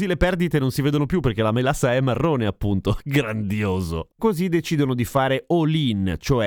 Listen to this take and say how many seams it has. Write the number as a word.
one